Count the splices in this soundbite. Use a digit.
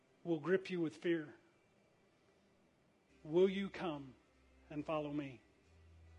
1